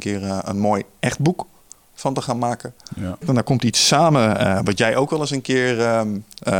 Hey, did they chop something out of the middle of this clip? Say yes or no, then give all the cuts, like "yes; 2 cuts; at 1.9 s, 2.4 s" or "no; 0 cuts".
yes; 1 cut; at 3.2 s